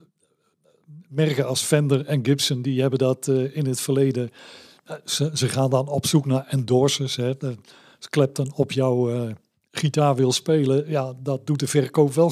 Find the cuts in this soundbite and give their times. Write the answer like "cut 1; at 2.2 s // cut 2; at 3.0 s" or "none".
none